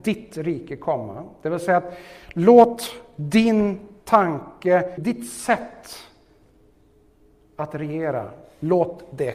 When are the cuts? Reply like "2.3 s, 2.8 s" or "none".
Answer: 5.0 s